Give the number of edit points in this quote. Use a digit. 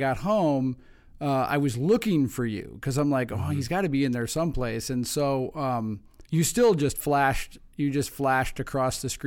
1